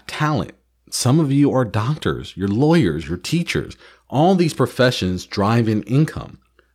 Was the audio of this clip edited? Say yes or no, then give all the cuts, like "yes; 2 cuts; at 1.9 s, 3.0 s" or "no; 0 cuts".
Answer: yes; 1 cut; at 3.0 s